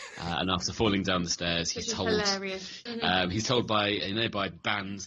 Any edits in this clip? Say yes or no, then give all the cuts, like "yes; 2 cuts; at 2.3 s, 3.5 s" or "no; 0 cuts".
yes; 1 cut; at 2.9 s